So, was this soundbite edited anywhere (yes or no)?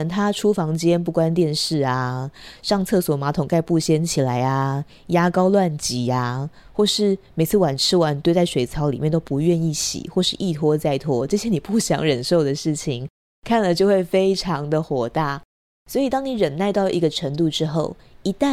no